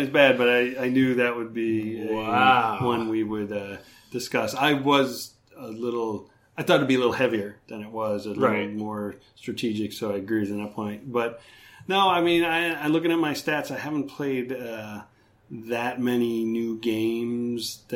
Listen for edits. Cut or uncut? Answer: uncut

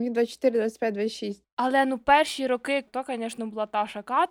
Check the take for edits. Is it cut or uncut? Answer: cut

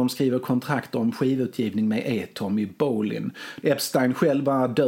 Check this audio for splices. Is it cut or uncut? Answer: cut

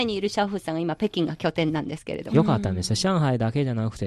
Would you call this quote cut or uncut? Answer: cut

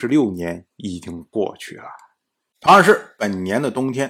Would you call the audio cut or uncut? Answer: uncut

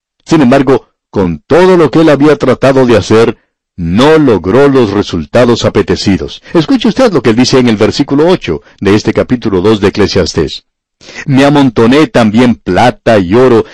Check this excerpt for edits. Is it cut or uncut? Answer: uncut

